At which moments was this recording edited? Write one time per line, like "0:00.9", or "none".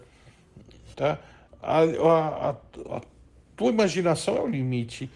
0:00.9